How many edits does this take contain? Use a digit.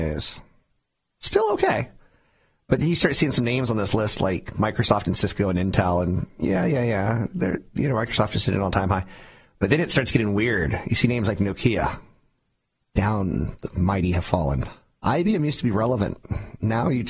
1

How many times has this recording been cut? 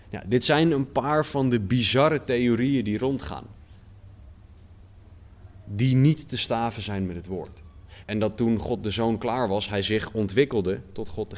1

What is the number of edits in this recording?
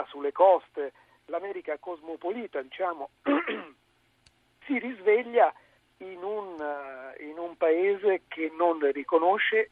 0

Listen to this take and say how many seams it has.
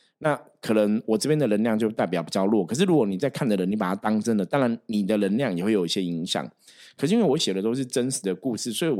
0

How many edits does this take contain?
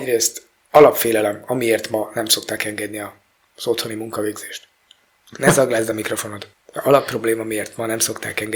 1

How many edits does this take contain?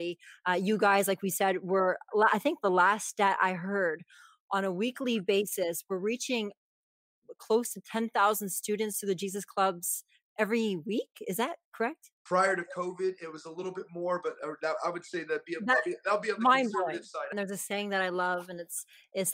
1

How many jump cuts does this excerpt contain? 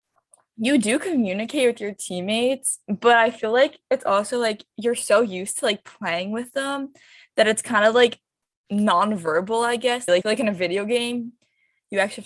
1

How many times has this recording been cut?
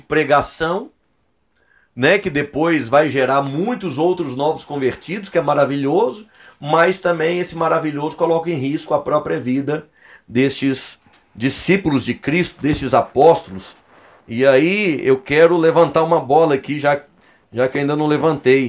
0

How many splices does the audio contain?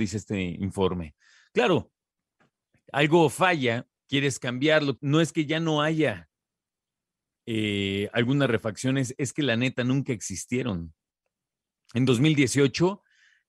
1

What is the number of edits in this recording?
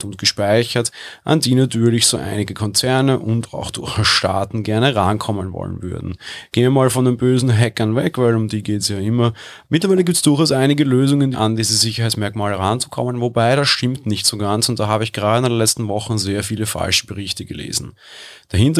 2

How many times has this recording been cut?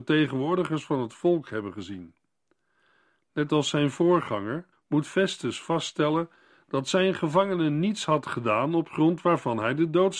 1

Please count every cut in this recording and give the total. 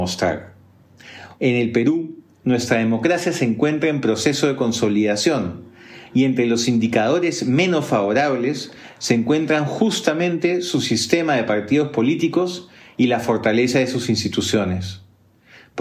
1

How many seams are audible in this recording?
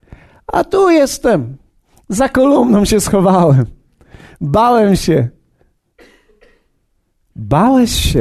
0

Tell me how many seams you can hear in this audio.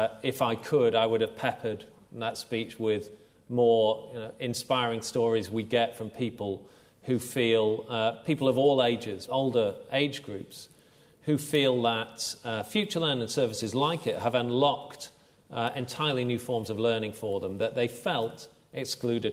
1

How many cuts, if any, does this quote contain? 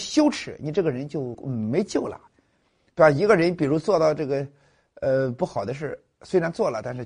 1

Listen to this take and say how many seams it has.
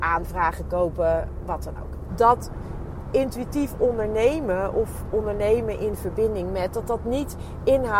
1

